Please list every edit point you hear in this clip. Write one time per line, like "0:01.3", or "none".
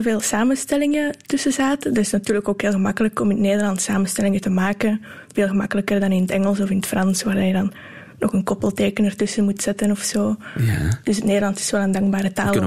none